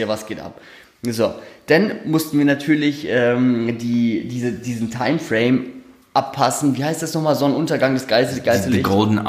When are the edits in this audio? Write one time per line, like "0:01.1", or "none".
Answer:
none